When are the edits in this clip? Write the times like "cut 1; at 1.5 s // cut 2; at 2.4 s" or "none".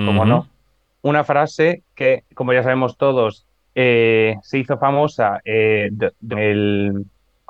cut 1; at 0.9 s // cut 2; at 2.3 s // cut 3; at 6.3 s